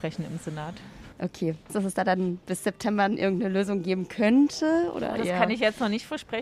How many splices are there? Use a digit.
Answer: 1